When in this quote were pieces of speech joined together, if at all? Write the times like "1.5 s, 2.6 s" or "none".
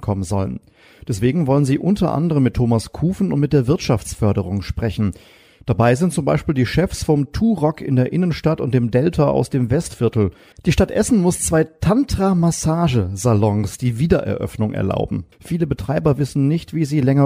10.5 s, 15.3 s